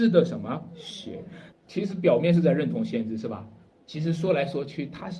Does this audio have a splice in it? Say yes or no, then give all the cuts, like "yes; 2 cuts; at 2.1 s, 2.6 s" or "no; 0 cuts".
yes; 2 cuts; at 1.5 s, 3.7 s